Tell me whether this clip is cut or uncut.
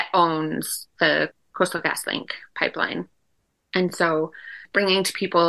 uncut